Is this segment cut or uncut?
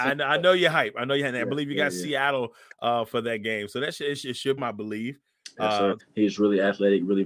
cut